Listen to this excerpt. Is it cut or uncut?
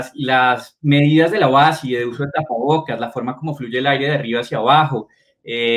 uncut